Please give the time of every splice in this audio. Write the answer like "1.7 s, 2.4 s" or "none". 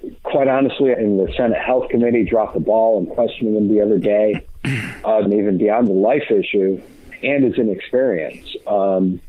0.9 s, 5.3 s